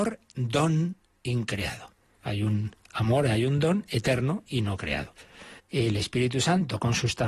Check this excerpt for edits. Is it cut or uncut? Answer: cut